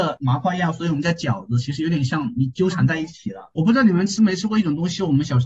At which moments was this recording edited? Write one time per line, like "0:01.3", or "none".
0:03.5